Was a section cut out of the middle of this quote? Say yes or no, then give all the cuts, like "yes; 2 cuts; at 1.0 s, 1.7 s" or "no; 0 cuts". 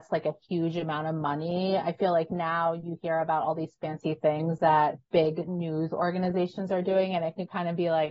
no; 0 cuts